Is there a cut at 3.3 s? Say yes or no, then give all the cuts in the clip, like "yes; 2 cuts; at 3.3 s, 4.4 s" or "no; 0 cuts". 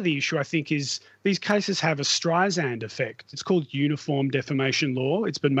yes; 1 cut; at 3.3 s